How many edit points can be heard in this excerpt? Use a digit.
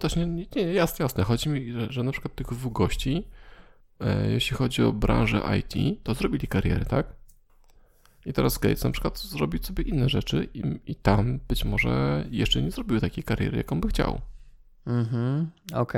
0